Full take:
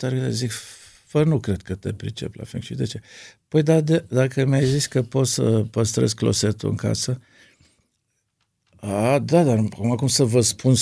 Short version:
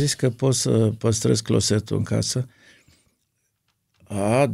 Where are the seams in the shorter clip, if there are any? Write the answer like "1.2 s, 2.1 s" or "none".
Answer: none

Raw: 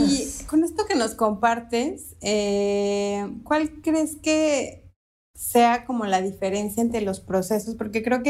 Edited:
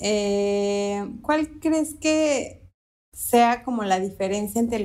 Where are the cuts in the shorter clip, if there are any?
none

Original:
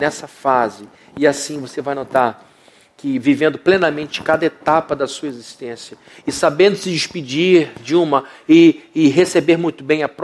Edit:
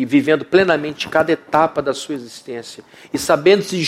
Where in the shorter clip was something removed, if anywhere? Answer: none

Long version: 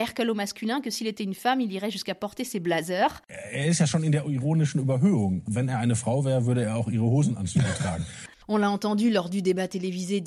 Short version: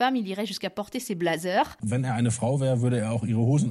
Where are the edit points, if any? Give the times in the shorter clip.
1.8 s

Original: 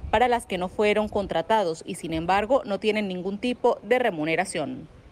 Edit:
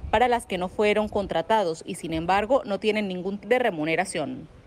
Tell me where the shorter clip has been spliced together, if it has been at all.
3.4 s

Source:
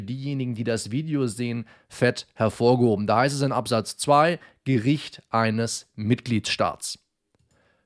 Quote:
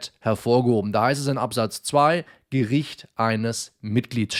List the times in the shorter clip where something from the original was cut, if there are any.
none

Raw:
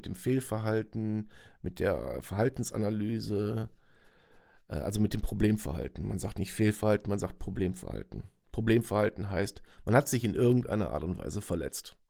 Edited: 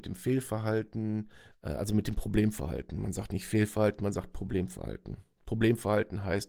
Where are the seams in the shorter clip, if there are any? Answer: 1.5 s

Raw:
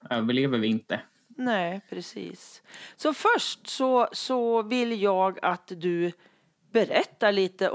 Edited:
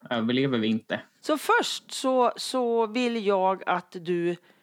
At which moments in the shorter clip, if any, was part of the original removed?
1.2 s

